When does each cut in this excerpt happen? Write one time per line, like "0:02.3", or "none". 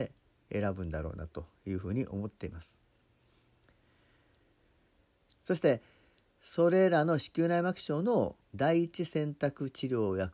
0:05.3
0:08.4